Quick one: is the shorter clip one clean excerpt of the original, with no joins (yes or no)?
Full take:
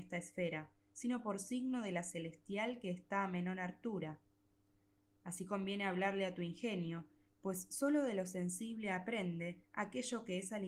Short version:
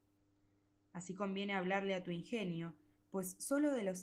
yes